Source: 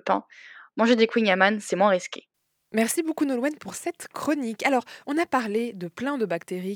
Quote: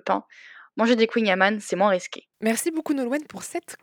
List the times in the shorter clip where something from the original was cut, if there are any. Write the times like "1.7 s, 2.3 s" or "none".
2.3 s